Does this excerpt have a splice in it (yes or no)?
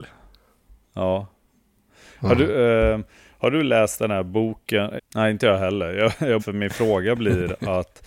yes